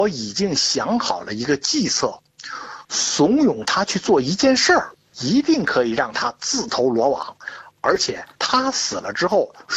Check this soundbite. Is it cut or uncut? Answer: uncut